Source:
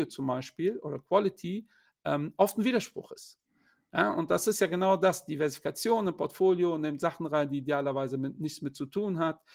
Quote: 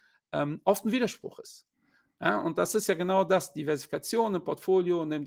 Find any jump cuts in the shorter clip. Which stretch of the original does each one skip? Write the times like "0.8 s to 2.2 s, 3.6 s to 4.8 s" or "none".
none